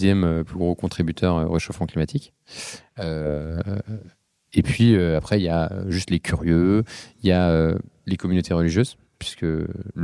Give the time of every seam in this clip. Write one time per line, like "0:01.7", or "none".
none